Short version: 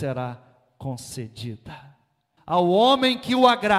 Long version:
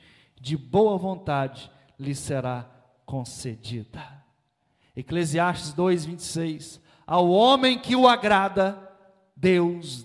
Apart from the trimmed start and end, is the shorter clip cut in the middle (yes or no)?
yes